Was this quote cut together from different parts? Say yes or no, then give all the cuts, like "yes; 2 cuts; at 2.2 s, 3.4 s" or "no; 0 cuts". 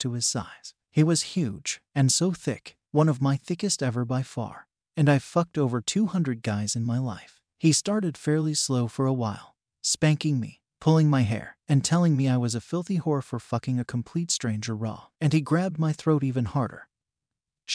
yes; 2 cuts; at 11.6 s, 15.1 s